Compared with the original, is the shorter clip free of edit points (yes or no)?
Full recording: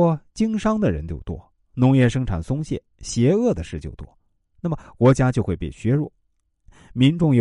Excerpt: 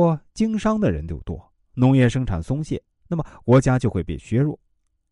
no